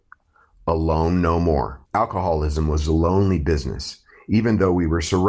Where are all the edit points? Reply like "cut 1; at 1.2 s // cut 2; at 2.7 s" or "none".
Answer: cut 1; at 1.8 s